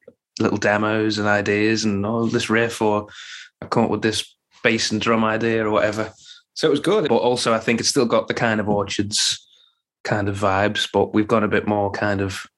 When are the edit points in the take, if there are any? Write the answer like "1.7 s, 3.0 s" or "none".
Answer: 7.1 s

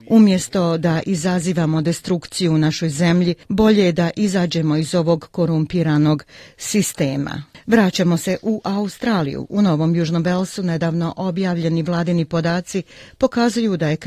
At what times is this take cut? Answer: 3.4 s

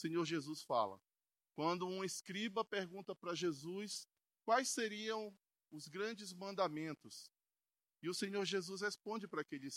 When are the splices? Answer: 1.4 s

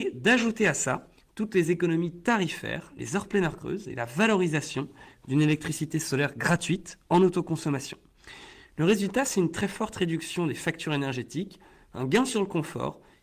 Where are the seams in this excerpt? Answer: none

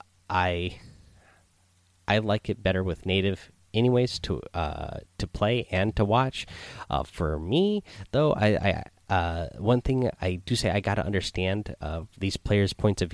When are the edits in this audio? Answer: none

